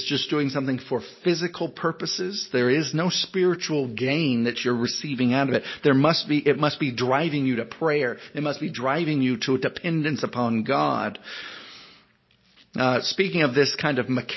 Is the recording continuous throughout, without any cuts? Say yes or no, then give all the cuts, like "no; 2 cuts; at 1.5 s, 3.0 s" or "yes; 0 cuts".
no; 1 cut; at 12.6 s